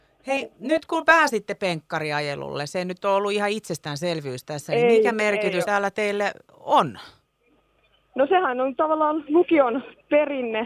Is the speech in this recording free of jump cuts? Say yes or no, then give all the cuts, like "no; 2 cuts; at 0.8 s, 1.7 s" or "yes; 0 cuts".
yes; 0 cuts